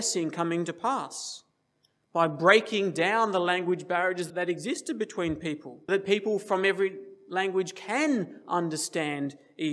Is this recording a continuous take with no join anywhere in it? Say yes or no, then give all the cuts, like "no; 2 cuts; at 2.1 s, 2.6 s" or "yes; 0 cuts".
no; 2 cuts; at 4.3 s, 5.9 s